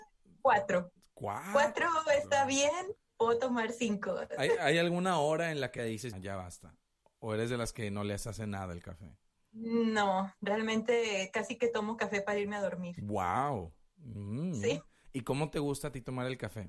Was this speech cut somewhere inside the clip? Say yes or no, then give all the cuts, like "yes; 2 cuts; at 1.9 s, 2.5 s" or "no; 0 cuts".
yes; 1 cut; at 6.1 s